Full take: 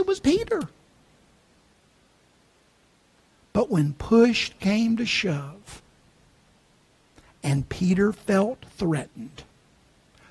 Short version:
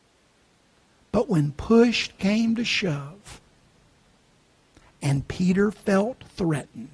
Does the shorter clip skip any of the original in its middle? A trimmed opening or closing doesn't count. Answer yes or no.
no